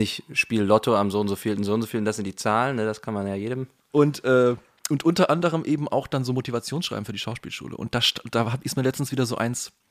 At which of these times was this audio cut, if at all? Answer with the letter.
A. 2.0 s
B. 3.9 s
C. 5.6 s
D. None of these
B